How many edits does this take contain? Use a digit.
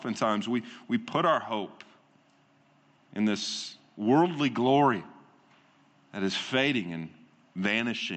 0